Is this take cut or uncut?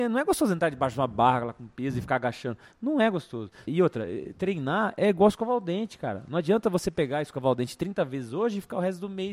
cut